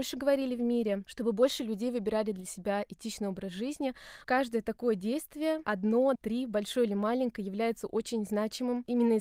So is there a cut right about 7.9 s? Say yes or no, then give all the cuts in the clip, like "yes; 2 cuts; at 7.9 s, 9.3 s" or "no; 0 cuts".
no; 2 cuts; at 4.2 s, 6.1 s